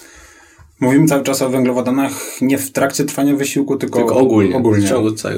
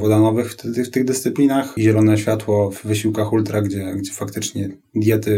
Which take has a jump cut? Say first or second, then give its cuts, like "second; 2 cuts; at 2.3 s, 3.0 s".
second; 1 cut; at 1.8 s